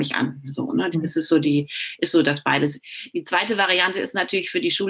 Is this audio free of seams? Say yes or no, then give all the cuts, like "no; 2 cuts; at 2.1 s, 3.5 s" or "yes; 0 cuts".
no; 1 cut; at 0.9 s